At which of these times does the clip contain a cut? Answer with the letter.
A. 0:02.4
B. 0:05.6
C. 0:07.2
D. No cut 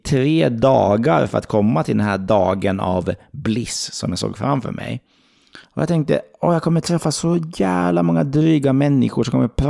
D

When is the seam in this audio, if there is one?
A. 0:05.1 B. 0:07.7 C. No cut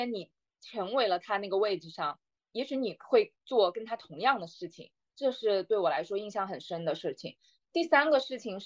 A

